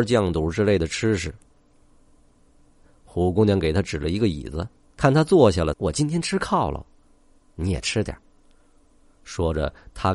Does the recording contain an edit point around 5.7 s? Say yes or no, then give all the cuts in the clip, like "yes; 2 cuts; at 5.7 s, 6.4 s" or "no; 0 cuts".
yes; 1 cut; at 5.7 s